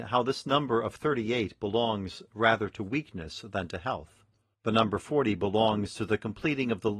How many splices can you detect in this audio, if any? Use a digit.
1